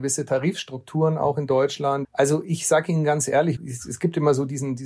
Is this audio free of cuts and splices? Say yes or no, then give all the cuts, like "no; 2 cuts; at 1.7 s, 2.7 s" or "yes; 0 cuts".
no; 2 cuts; at 2.0 s, 3.6 s